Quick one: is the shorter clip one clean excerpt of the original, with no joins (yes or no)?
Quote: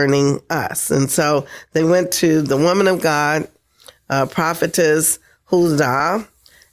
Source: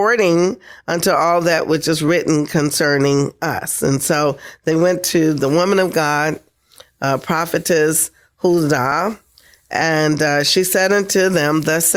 yes